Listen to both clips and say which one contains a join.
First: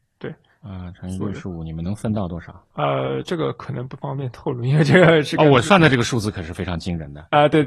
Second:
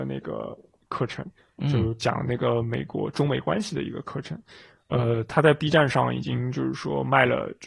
first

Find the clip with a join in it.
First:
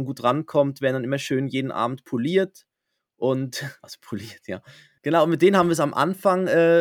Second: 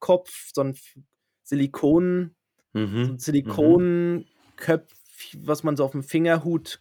first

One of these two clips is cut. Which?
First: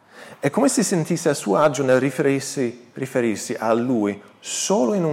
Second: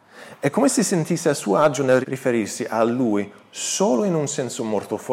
second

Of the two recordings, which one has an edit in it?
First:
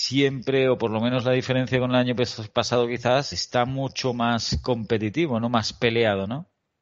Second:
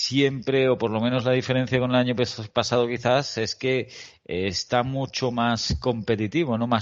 first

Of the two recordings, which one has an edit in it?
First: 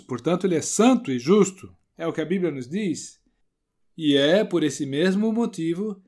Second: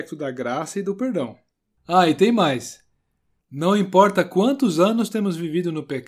second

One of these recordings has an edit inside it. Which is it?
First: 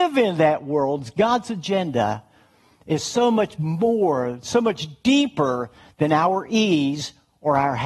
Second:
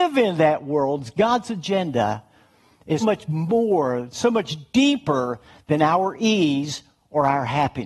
second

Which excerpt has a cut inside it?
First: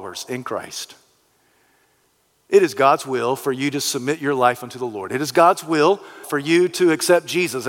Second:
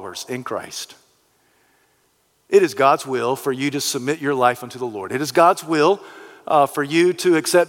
first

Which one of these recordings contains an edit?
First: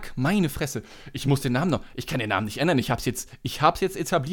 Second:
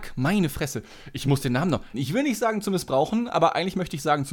second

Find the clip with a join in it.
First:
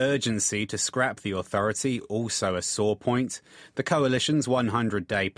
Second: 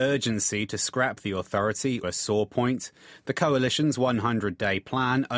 second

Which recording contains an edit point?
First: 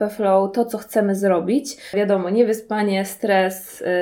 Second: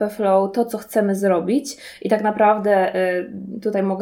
first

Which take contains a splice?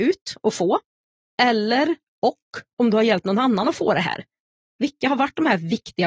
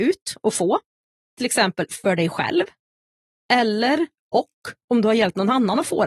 first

